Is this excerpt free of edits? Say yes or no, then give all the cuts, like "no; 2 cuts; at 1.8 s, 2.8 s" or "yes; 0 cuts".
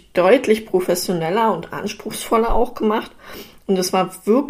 yes; 0 cuts